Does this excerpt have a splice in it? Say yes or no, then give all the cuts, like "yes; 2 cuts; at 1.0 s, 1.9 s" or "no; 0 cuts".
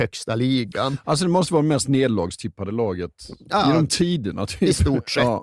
no; 0 cuts